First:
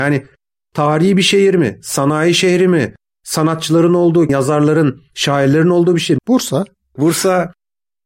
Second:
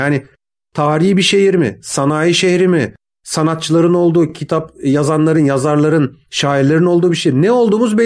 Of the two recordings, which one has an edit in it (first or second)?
first